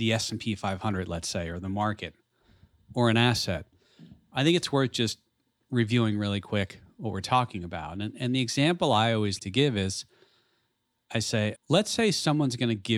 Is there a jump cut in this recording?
yes; 2 cuts; at 9.4 s, 11.6 s

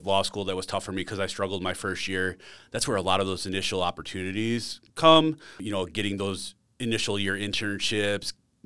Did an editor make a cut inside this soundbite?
yes; 1 cut; at 4.9 s

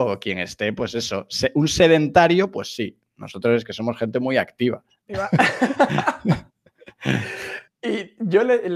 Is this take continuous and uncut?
yes; 0 cuts

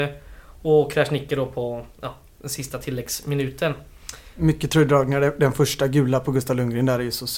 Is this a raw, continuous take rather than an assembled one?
no; 1 cut; at 4.4 s

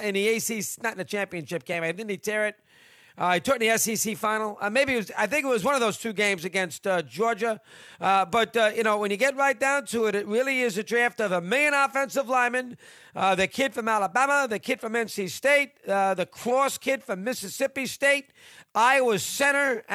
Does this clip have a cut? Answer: no; 0 cuts

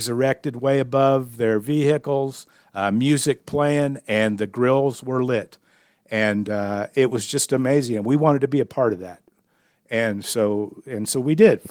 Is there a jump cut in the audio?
no; 0 cuts

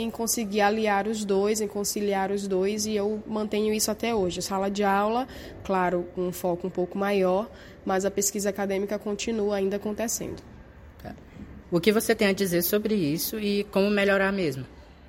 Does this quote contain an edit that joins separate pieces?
yes; 2 cuts; at 5.6 s, 11.6 s

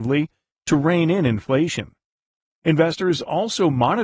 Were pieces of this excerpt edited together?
no; 0 cuts

